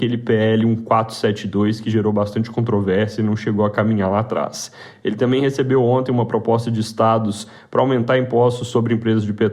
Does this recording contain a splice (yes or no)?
no